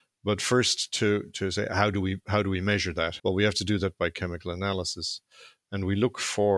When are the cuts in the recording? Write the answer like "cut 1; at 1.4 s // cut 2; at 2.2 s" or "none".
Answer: cut 1; at 3.2 s